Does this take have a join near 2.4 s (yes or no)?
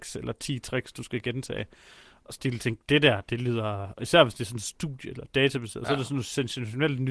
yes